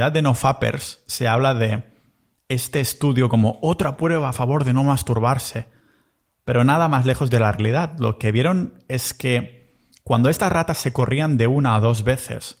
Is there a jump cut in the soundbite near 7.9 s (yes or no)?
no